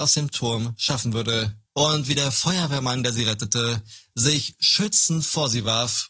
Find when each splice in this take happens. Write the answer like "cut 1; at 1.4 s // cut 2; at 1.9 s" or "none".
cut 1; at 1.7 s